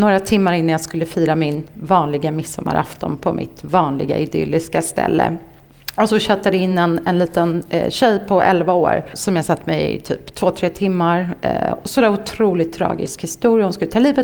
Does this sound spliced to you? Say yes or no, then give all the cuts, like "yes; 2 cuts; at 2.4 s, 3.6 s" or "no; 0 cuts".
no; 0 cuts